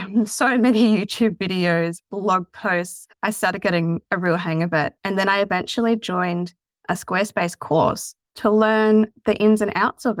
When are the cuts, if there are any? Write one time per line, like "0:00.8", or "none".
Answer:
none